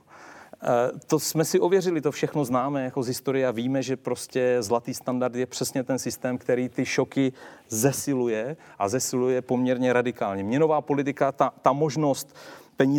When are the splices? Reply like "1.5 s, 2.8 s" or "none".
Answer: none

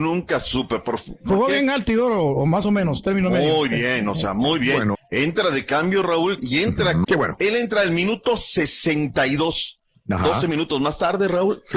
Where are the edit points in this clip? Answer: 4.9 s, 7.0 s

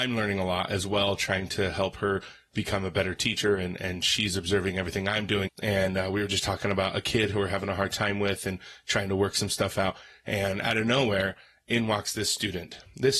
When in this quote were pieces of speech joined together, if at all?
5.5 s

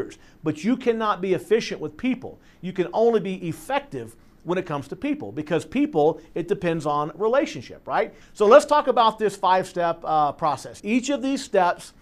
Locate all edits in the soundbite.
8.2 s, 10.8 s

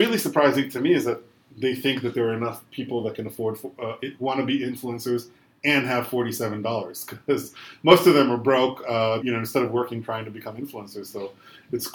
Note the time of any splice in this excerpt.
9.2 s

